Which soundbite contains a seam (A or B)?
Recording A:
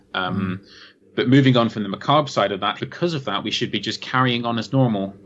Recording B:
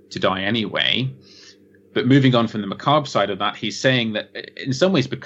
A